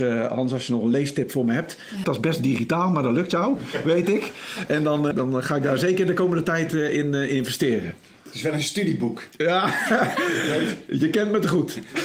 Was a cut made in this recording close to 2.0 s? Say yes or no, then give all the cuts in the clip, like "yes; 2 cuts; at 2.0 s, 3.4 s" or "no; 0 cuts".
yes; 2 cuts; at 2.0 s, 5.1 s